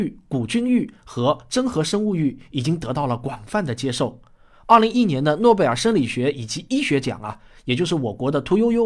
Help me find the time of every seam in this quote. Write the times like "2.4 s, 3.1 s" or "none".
4.9 s